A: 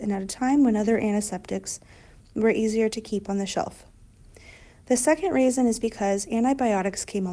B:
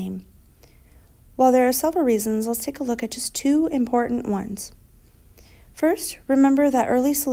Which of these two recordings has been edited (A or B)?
A